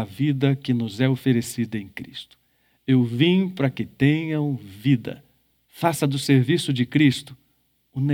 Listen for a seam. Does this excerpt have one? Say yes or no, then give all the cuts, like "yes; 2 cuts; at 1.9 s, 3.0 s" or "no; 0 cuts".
yes; 1 cut; at 5.6 s